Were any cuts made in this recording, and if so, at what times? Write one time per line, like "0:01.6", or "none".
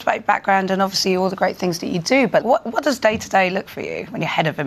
0:02.4
0:03.6